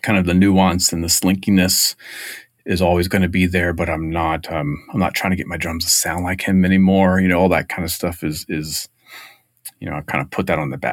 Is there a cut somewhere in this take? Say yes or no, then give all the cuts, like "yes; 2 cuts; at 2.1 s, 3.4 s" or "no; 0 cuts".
no; 0 cuts